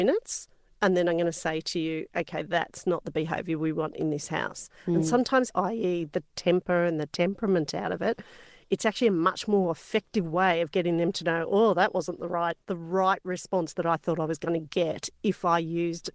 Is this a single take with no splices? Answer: no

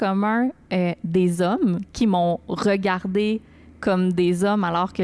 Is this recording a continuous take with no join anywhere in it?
yes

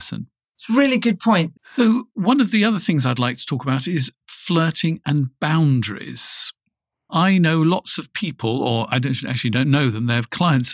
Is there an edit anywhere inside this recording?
yes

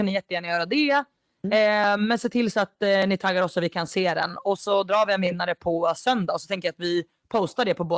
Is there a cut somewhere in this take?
no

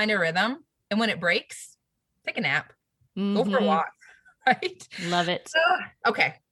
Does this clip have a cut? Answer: no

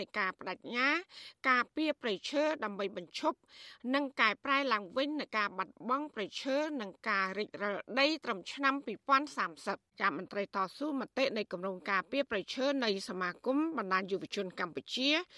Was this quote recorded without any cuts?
no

